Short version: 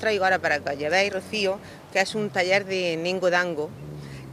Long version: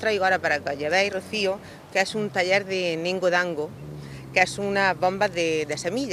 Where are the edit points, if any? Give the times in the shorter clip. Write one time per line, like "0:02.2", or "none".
none